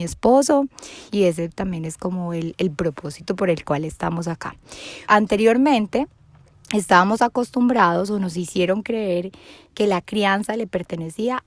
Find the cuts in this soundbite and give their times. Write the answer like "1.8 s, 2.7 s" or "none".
1.1 s, 5.1 s